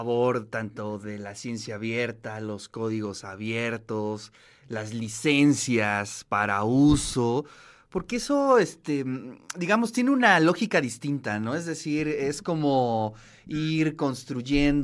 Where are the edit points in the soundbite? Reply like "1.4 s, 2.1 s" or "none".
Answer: none